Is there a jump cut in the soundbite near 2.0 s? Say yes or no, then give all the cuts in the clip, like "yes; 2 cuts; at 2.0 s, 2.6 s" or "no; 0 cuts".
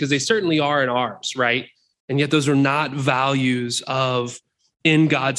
yes; 1 cut; at 2.0 s